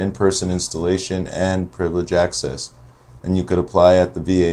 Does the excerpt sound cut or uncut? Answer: cut